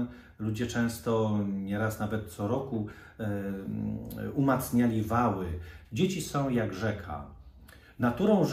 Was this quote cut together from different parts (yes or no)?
yes